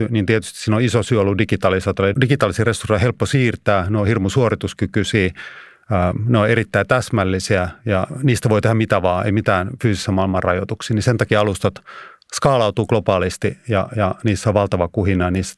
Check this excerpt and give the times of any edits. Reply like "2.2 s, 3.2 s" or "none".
2.1 s